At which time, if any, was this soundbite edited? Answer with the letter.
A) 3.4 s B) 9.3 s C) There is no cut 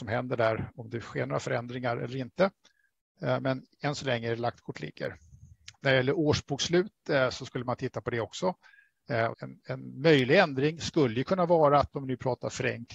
B